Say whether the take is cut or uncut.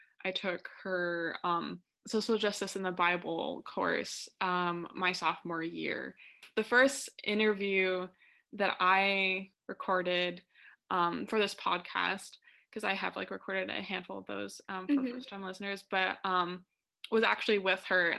uncut